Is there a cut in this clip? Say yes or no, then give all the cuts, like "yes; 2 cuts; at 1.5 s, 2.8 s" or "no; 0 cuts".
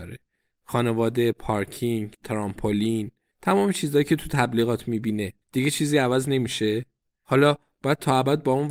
yes; 2 cuts; at 3.3 s, 5.4 s